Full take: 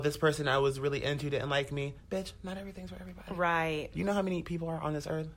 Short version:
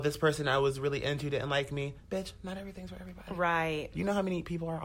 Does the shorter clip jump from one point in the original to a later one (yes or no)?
no